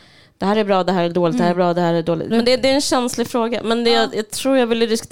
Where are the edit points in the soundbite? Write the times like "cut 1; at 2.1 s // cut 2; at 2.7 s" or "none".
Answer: cut 1; at 2.3 s